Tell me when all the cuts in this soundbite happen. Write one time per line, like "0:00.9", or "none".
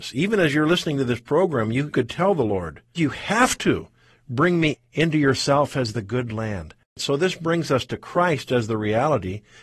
0:02.9